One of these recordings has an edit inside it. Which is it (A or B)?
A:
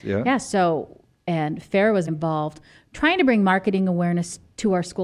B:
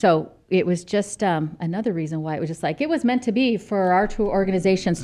A